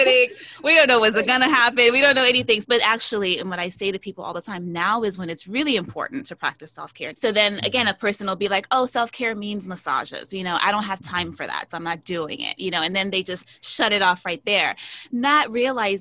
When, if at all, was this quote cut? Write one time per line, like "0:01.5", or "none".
0:02.6
0:07.1